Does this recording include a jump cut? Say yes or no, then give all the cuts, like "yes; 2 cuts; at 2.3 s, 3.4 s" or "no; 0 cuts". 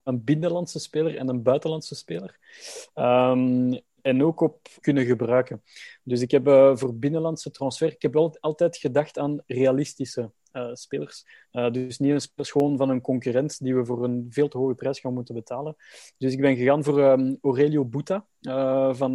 yes; 1 cut; at 4.8 s